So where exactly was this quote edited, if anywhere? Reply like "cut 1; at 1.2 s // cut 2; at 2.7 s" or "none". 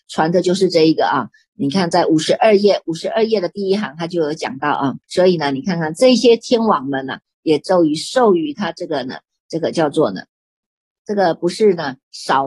cut 1; at 5.0 s // cut 2; at 11.0 s